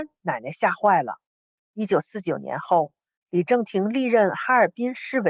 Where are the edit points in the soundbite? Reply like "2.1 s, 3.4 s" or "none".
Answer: 1.7 s